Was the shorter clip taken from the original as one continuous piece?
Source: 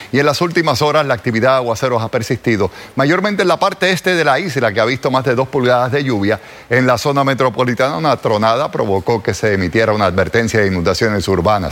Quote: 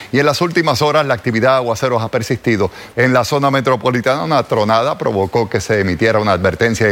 no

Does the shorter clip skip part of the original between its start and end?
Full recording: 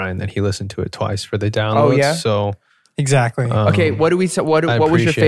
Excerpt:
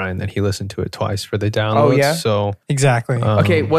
yes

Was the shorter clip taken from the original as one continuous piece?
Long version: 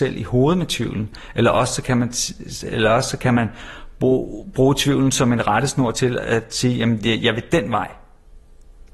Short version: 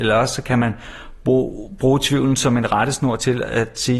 yes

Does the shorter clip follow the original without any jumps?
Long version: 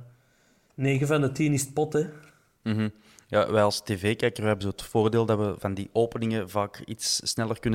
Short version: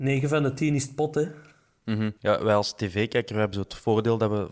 no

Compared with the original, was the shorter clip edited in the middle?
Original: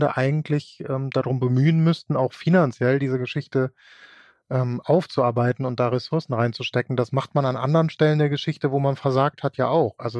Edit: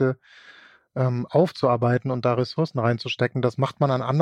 no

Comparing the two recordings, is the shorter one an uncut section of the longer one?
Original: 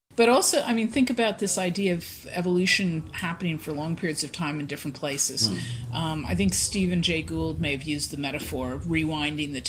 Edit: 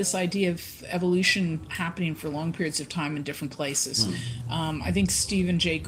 yes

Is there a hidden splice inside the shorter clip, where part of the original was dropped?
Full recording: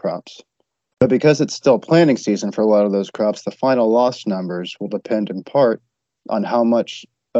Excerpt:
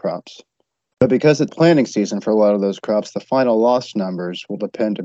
yes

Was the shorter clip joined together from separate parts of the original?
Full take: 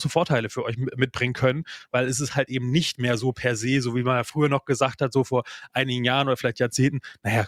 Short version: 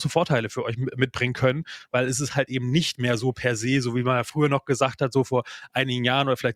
no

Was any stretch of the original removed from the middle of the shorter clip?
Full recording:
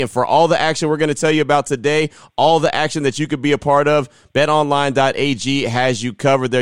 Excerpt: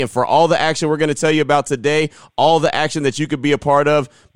no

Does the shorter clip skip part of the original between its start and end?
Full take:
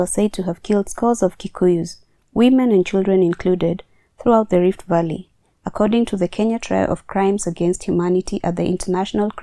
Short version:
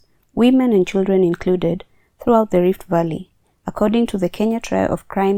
no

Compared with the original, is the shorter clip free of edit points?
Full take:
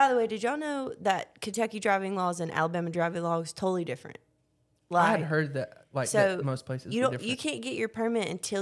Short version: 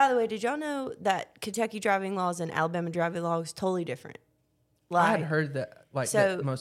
yes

